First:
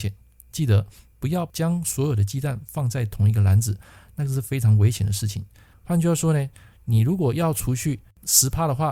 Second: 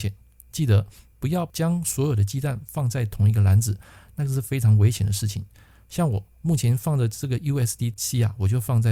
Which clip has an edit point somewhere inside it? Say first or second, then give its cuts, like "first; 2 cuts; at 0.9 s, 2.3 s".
first; 1 cut; at 5.7 s